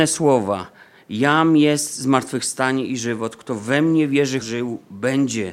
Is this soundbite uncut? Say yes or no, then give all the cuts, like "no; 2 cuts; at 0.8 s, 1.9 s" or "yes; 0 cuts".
no; 1 cut; at 4.4 s